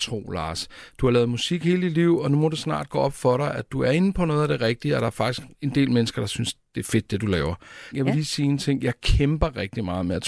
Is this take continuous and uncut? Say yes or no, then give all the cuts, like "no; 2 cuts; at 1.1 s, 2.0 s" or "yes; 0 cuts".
no; 2 cuts; at 5.5 s, 7.9 s